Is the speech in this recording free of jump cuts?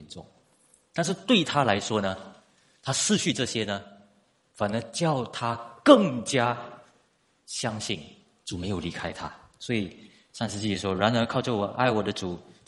yes; 0 cuts

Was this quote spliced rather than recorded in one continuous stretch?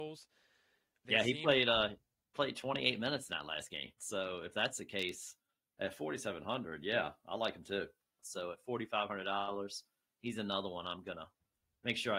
yes; 3 cuts; at 1.0 s, 4.0 s, 8.2 s

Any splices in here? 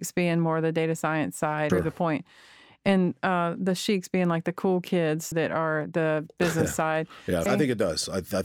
yes; 3 cuts; at 1.7 s, 5.3 s, 7.5 s

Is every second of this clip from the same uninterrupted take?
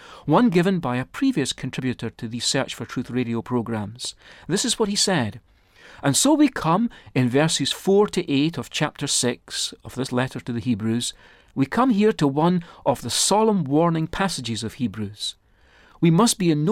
yes; 0 cuts

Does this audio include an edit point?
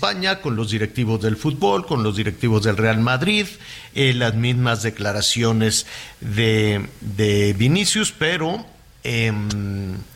no; 0 cuts

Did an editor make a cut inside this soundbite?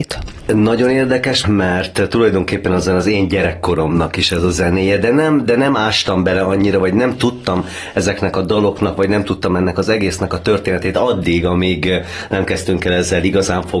yes; 1 cut; at 1.4 s

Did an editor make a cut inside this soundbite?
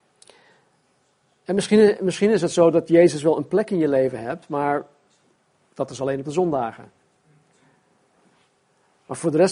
no; 0 cuts

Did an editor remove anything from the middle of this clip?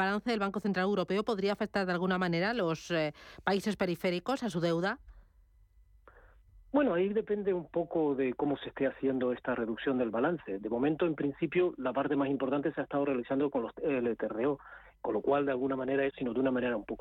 yes; 1 cut; at 16.1 s

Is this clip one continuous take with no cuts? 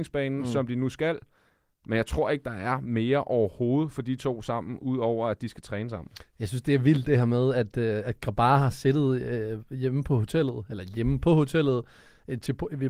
yes; 0 cuts

